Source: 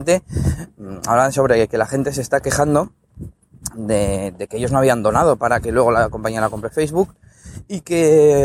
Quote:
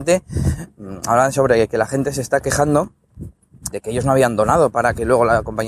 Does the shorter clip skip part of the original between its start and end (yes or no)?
yes